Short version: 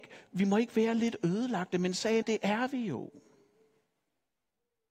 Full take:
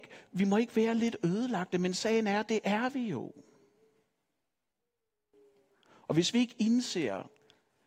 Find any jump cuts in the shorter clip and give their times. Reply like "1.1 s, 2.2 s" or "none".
2.2 s